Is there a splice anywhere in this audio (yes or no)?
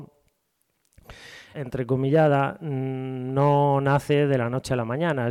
yes